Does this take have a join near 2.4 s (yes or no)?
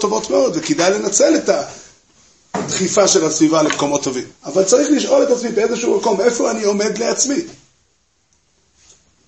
no